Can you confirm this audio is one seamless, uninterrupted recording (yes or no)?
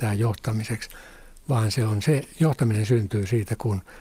yes